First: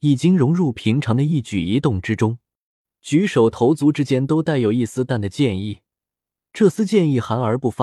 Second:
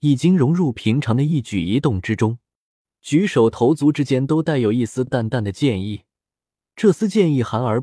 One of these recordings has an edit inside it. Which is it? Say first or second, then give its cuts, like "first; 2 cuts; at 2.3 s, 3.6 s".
first; 1 cut; at 5.1 s